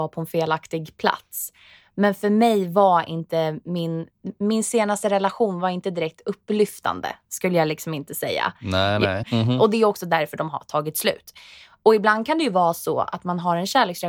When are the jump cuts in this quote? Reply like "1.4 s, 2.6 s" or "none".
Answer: 9.2 s